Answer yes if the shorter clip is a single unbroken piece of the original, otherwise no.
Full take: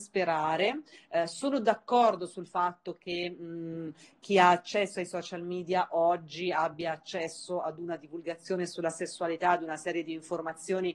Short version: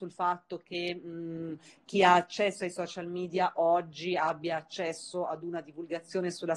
yes